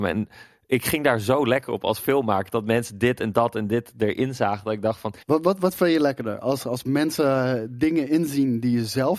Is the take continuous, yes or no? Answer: no